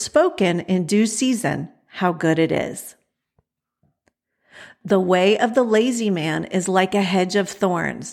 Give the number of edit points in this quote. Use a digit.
1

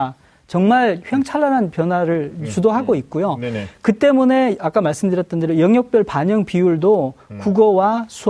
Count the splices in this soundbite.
0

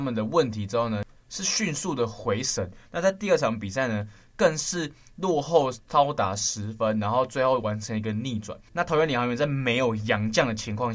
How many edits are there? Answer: 1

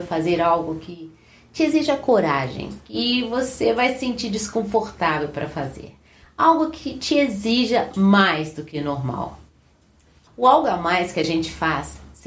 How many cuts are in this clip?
1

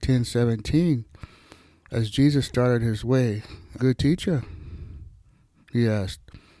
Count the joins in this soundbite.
1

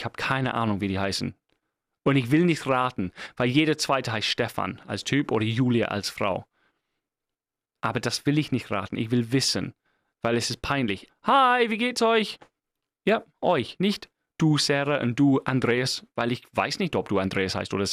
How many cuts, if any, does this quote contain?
1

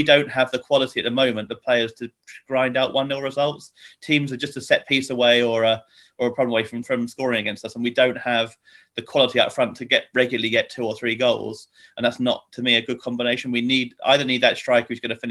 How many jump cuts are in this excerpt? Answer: 1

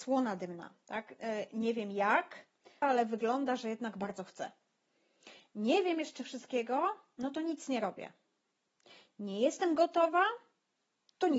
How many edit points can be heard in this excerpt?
1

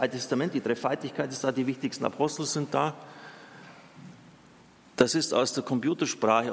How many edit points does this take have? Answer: 0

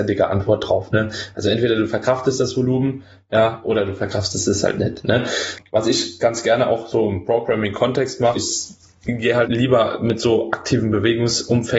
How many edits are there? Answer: 2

